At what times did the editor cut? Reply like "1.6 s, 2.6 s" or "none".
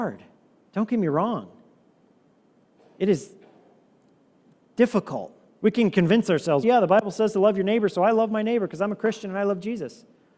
5.6 s, 6.6 s